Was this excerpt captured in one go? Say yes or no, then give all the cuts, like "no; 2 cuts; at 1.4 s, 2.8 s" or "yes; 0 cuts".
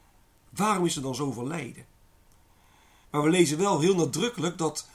no; 1 cut; at 3.0 s